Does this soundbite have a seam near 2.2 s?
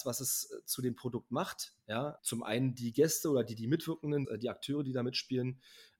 yes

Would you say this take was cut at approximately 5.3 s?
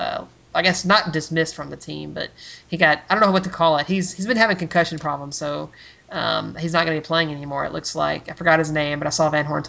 no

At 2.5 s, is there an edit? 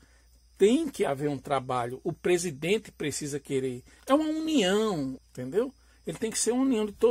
no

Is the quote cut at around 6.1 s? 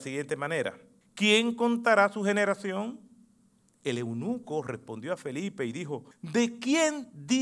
yes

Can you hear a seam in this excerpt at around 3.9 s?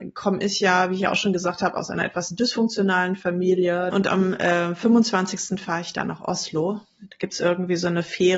yes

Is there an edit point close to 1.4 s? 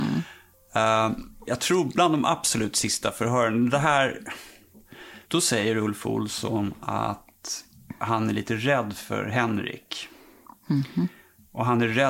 yes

